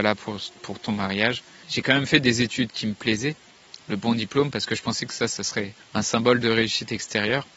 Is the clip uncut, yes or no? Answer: no